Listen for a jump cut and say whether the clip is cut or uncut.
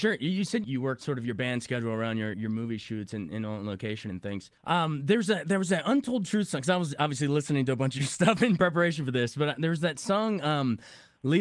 cut